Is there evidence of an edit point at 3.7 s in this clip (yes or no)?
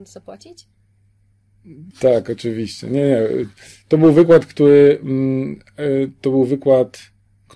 no